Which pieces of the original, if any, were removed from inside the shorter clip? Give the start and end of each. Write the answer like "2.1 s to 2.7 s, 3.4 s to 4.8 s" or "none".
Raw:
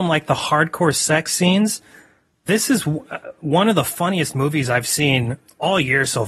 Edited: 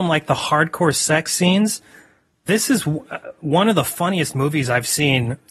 none